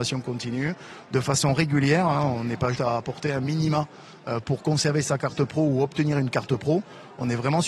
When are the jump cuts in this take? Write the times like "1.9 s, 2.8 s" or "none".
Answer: 2.7 s